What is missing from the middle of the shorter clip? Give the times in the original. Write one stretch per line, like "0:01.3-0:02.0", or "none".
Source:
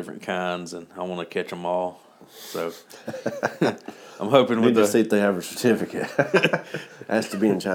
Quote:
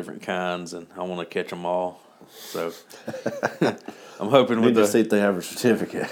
none